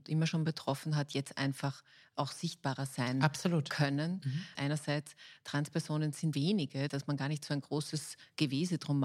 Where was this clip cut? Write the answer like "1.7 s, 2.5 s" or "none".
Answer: 4.6 s, 6.3 s